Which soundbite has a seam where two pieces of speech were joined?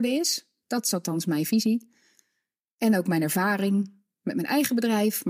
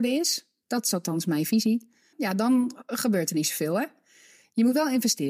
second; 1 cut; at 2.1 s

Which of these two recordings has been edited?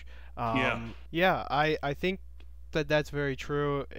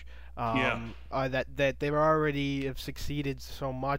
first; 1 cut; at 1.1 s

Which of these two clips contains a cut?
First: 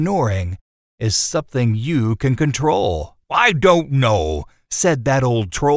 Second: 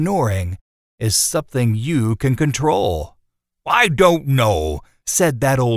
first; 1 cut; at 3.2 s

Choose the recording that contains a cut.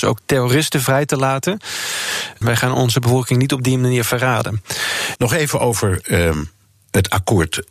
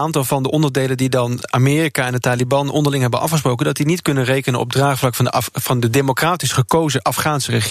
first; 2 cuts; at 2.4 s, 5.2 s

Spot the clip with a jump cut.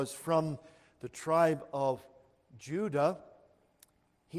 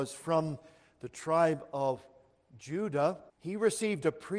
second; 1 cut; at 3.3 s

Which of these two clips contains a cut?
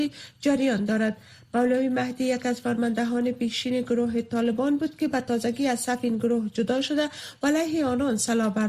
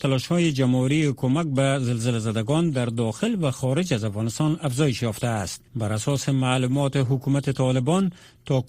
second; 1 cut; at 5.7 s

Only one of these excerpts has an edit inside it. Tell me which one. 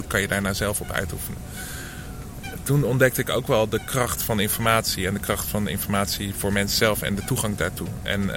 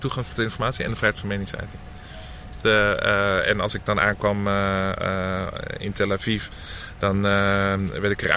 second; 1 cut; at 2.6 s

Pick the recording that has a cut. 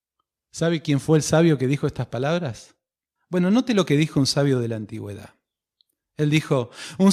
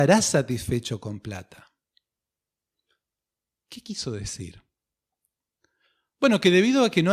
first; 1 cut; at 3.2 s

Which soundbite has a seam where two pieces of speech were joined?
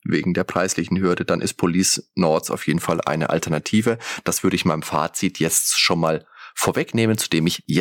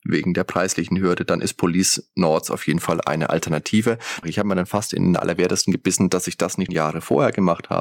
second; 2 cuts; at 4.2 s, 6.7 s

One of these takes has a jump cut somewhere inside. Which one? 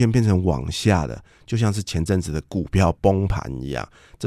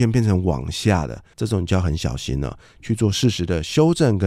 second; 2 cuts; at 1.3 s, 2.8 s

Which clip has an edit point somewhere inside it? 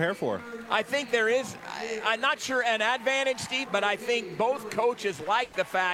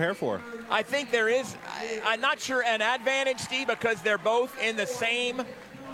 first; 1 cut; at 3.7 s

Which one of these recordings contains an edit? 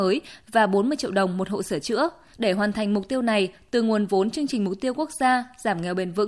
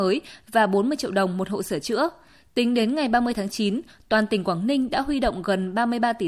first; 1 cut; at 2.3 s

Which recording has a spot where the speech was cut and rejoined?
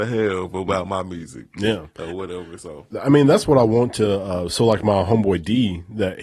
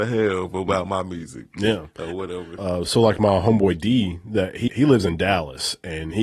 second; 2 cuts; at 2.6 s, 4.7 s

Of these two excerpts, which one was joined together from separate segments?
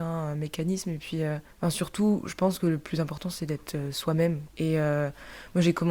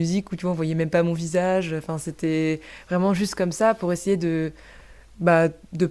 first; 2 cuts; at 1.5 s, 4.5 s

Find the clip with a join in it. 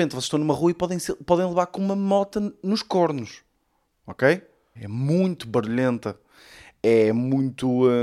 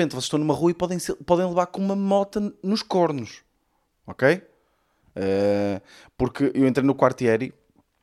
first; 1 cut; at 4.8 s

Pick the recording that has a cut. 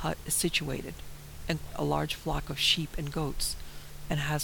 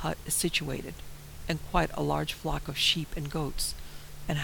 first; 1 cut; at 1.7 s

